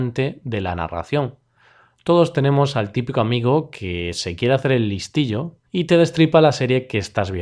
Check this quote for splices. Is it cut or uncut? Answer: cut